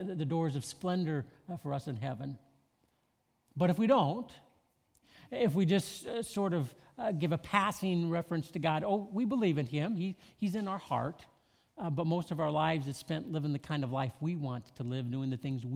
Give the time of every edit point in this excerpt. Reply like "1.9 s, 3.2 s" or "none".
none